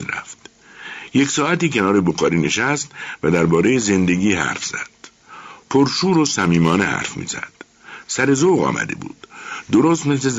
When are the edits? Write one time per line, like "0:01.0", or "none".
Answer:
none